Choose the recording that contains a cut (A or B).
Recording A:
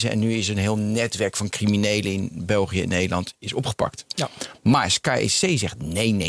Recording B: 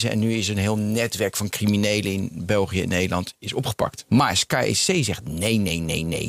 B